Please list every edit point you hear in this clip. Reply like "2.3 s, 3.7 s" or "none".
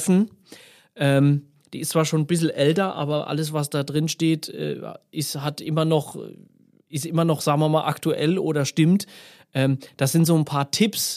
none